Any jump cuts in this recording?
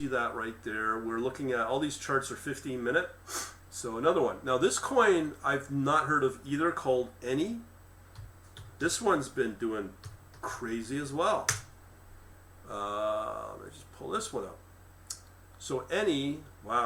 no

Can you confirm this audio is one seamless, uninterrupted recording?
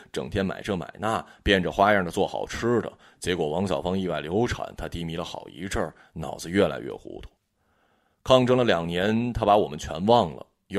yes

